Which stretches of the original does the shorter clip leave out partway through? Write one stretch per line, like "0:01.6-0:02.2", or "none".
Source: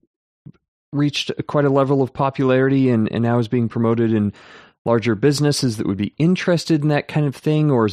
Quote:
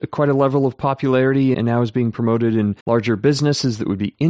0:02.9-0:03.1
0:04.4-0:04.8